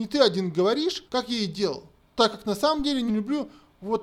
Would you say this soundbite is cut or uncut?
cut